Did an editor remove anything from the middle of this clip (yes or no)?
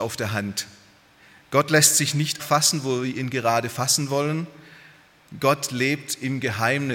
yes